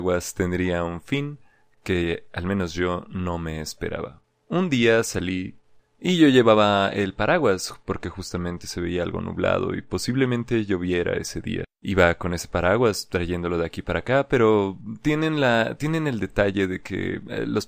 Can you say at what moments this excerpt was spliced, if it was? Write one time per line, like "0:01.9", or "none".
none